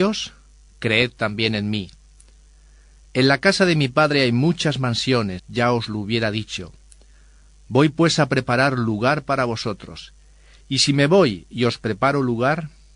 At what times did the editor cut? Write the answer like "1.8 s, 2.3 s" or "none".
5.4 s